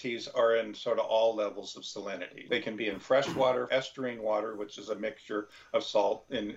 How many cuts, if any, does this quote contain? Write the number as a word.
two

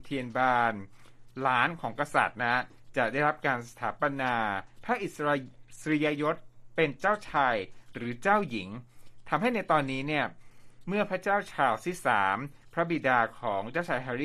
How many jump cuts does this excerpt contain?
zero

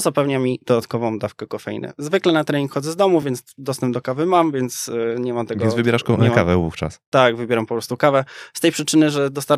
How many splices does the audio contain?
zero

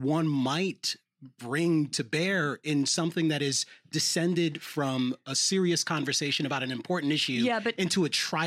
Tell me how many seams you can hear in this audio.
zero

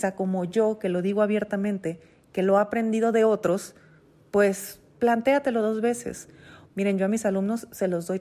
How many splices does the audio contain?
one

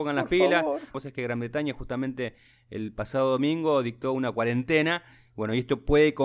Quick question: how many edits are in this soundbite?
one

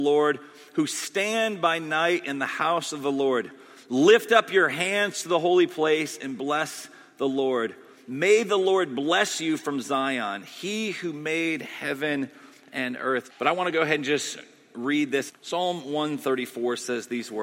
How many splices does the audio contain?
two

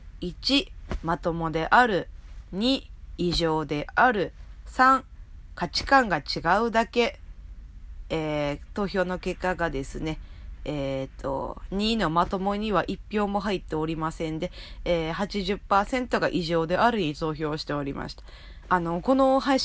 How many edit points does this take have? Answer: one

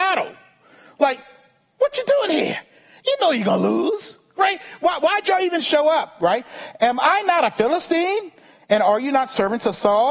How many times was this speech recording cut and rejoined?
zero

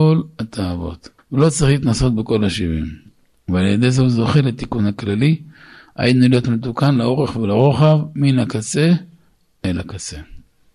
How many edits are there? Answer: one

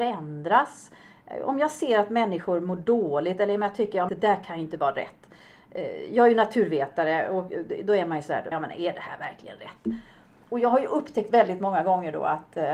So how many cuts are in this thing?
two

